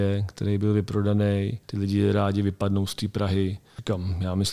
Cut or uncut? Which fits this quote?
cut